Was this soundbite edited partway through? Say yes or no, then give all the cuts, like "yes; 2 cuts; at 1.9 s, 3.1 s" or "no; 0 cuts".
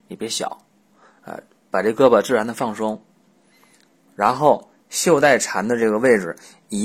no; 0 cuts